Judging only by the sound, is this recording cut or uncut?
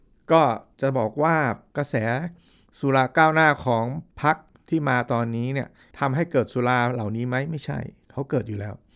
uncut